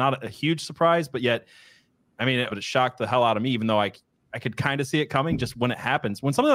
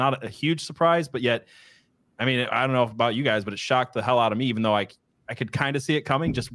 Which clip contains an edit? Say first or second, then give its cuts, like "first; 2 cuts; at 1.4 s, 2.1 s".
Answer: first; 1 cut; at 2.5 s